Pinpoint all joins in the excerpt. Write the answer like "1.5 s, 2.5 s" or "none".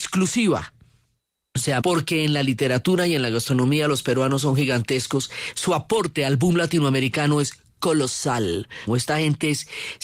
1.8 s, 8.9 s